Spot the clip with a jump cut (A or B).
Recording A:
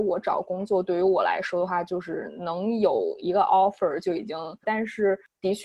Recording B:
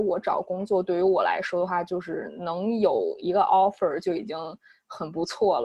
A